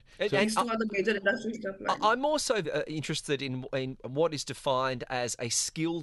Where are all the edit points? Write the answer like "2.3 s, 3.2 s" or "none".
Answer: 2.6 s